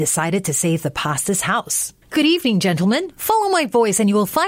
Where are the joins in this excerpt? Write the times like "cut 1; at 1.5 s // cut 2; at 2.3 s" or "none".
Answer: cut 1; at 2.0 s

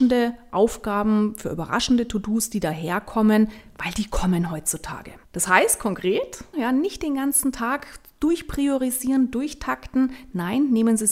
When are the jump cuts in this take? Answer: cut 1; at 5.2 s // cut 2; at 6.5 s

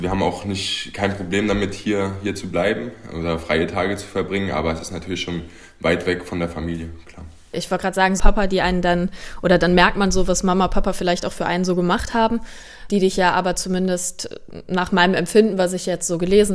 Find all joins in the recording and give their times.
cut 1; at 8.2 s

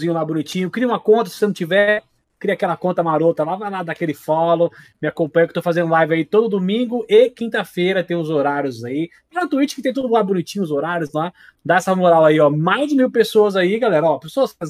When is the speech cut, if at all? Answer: none

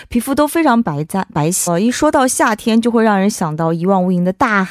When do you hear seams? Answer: cut 1; at 1.7 s

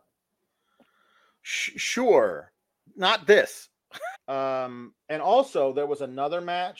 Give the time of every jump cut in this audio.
cut 1; at 2.9 s // cut 2; at 4.1 s

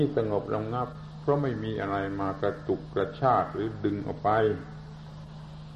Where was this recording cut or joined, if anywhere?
none

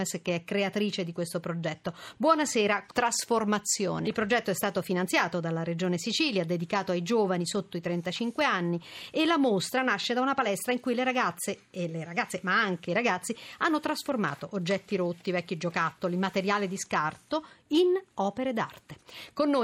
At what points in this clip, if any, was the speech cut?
cut 1; at 2.9 s // cut 2; at 4.0 s

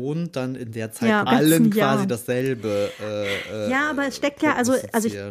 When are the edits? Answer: cut 1; at 1.3 s

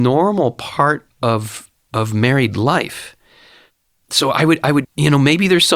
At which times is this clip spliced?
cut 1; at 4.8 s

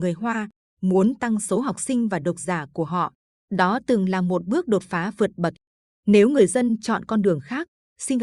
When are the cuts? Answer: cut 1; at 3.3 s

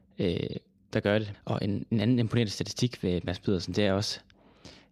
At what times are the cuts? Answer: cut 1; at 1.3 s

